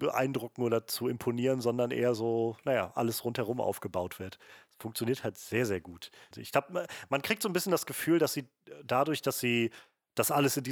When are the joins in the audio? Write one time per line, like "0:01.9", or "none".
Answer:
0:06.3